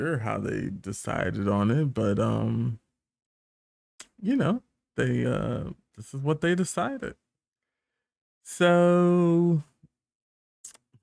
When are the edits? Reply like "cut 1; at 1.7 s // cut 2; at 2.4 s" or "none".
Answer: none

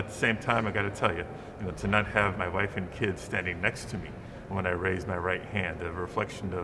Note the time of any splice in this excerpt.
cut 1; at 2.3 s

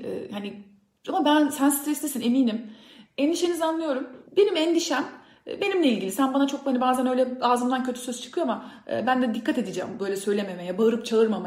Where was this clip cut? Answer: cut 1; at 3.1 s // cut 2; at 4.3 s

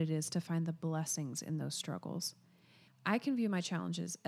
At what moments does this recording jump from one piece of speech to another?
cut 1; at 2.9 s

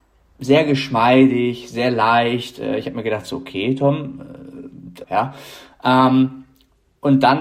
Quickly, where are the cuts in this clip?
cut 1; at 5.0 s

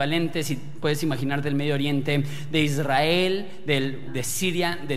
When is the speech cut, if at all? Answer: cut 1; at 4.1 s

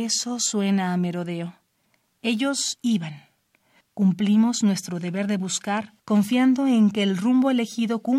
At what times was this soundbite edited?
cut 1; at 3.8 s // cut 2; at 6.0 s

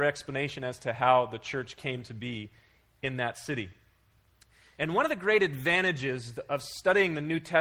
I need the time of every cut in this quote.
none

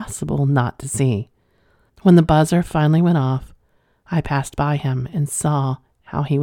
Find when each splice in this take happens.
cut 1; at 1.9 s

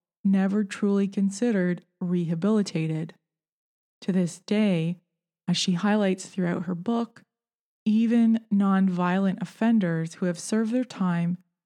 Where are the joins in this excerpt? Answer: none

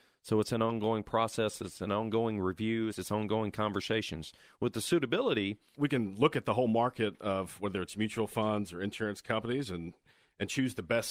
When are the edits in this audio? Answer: cut 1; at 2.9 s // cut 2; at 5.7 s

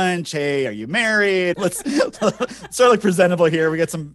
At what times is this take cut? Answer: cut 1; at 1.5 s

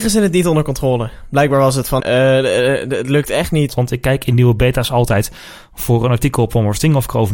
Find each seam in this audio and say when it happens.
cut 1; at 2.0 s // cut 2; at 3.7 s

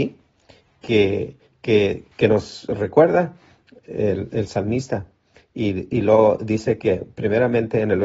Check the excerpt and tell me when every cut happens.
cut 1; at 2.1 s

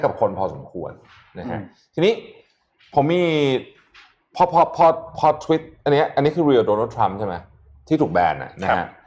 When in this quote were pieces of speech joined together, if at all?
none

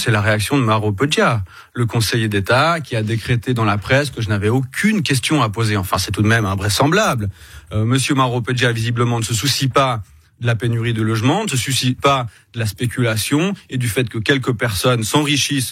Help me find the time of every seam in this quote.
cut 1; at 12.0 s

